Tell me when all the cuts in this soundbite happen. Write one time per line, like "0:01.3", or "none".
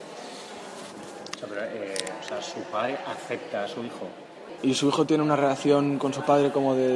0:01.3
0:04.6